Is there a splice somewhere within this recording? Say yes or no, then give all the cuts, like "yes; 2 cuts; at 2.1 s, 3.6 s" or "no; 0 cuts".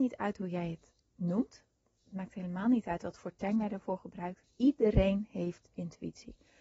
yes; 1 cut; at 4.4 s